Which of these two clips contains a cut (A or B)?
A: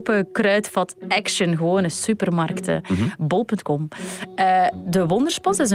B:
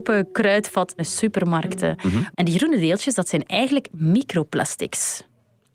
B